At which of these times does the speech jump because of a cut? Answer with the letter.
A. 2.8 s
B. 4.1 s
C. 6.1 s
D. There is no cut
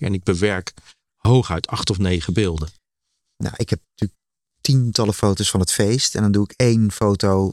D